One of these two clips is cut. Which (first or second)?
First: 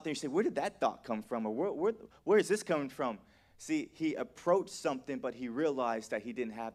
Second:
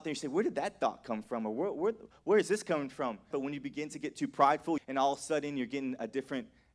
second